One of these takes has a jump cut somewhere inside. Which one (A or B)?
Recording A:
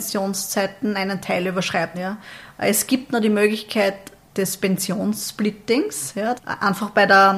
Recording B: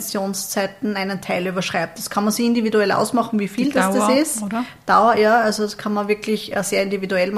A